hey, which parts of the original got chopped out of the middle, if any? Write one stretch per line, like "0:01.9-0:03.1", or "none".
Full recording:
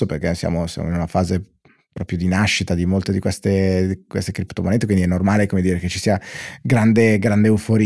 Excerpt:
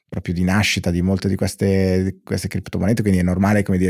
none